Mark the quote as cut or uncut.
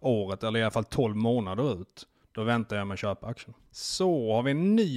uncut